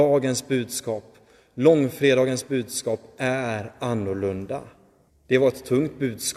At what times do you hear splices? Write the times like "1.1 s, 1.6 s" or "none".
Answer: 5.1 s